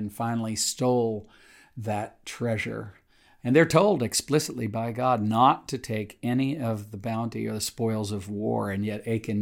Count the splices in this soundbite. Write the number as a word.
one